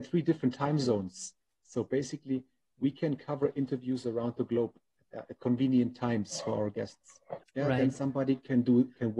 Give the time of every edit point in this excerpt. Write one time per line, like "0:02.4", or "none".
0:05.1
0:07.4